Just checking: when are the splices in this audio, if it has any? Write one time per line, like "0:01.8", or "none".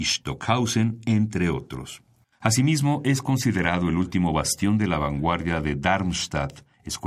none